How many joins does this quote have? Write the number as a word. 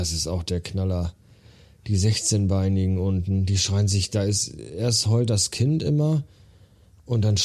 zero